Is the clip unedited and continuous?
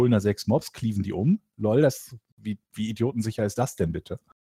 yes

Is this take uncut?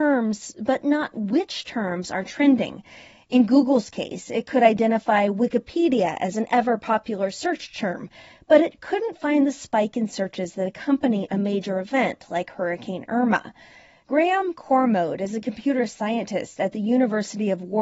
yes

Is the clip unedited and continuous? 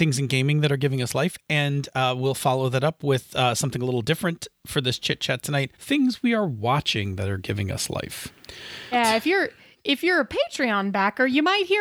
no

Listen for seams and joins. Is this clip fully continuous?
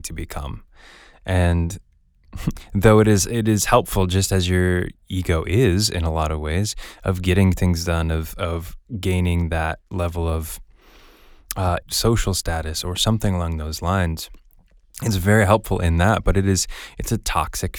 no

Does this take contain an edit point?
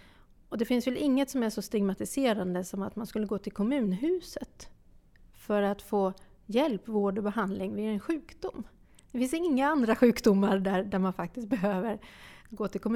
no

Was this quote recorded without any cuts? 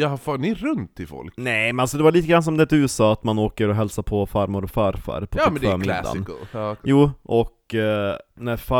yes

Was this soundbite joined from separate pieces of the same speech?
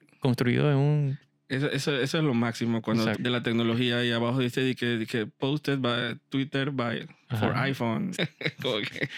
yes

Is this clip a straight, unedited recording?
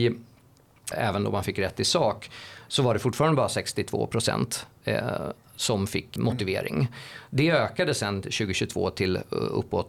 no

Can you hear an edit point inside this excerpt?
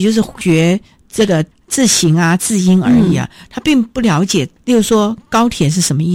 no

